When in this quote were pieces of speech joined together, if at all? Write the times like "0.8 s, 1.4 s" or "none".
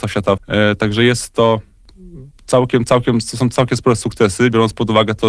none